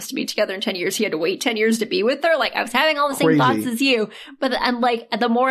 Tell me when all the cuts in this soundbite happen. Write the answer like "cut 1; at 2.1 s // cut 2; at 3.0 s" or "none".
none